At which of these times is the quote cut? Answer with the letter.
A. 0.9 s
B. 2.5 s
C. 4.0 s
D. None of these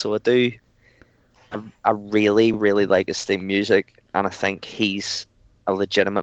D